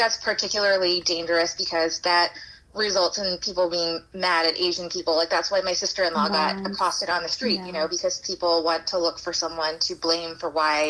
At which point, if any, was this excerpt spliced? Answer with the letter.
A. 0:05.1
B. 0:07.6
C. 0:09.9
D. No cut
D